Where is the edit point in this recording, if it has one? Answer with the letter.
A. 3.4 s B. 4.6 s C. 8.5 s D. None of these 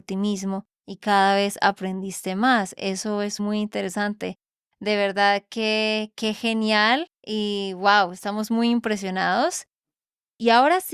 A